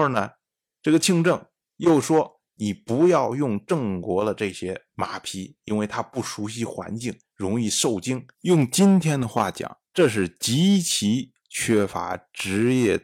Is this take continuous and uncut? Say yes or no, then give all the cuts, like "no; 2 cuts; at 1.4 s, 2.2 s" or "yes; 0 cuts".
no; 3 cuts; at 8.3 s, 9.9 s, 11.4 s